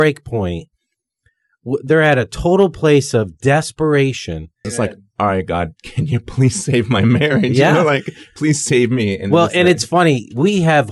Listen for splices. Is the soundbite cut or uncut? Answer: cut